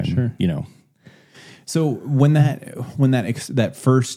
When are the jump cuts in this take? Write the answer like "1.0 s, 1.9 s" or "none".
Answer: none